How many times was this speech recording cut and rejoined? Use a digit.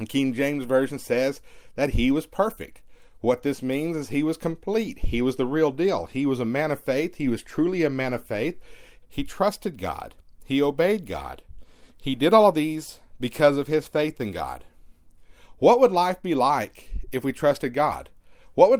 1